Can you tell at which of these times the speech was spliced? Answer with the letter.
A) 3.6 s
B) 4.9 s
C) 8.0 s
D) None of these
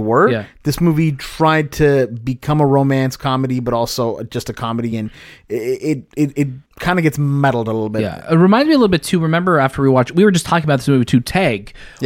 D